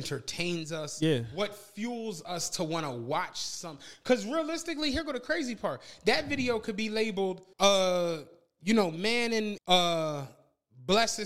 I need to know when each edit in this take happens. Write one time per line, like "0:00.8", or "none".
0:07.5
0:09.6